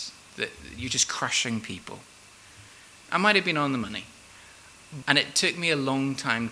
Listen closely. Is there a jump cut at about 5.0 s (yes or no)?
yes